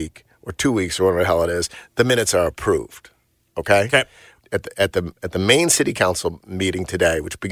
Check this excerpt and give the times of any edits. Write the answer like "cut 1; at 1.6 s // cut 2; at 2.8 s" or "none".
cut 1; at 4.4 s